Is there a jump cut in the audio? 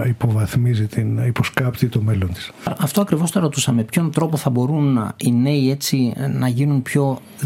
no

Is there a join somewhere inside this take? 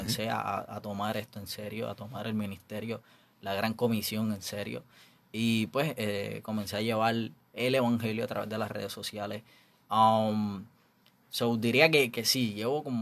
no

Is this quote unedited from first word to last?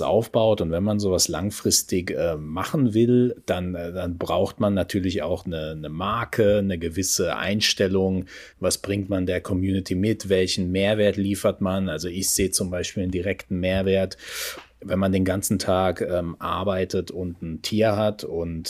yes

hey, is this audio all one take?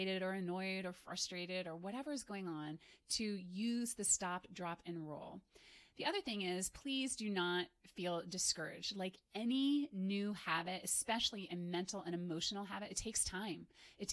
yes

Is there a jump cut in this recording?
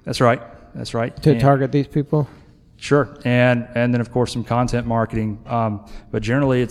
no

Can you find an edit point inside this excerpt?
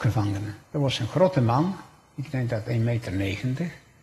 no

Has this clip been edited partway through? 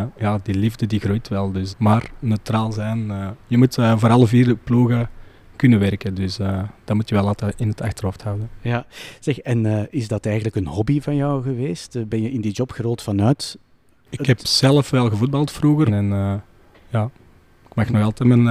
yes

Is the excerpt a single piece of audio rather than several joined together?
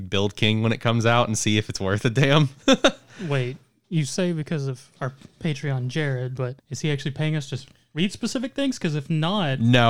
no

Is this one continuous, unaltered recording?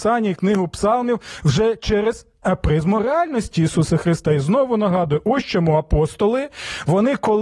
yes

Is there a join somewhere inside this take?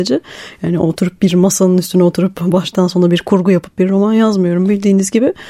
no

